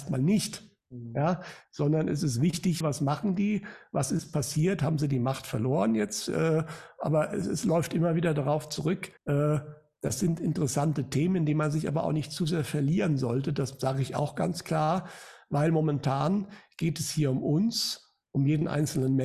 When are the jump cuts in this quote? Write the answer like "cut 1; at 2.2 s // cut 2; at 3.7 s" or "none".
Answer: cut 1; at 2.8 s // cut 2; at 9.2 s